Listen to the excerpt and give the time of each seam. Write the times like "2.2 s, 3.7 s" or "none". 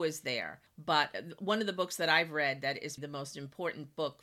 3.0 s